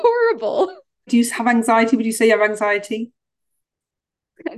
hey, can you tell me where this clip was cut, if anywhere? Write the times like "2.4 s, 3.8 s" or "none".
1.1 s